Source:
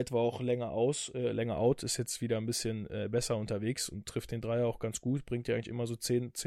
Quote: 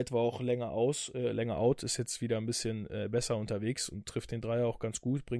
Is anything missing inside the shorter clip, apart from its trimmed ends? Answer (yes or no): no